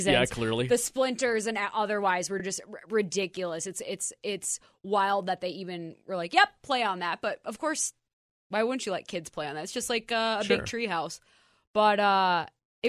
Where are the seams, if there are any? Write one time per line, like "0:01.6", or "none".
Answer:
none